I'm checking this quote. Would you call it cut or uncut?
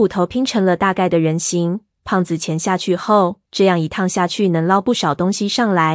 cut